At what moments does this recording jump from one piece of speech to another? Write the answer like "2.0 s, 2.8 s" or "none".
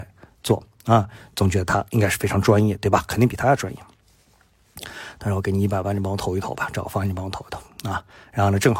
none